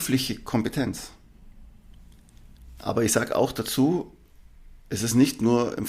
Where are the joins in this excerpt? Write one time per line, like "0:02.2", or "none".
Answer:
0:02.8